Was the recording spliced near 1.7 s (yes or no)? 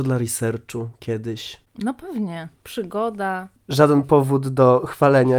no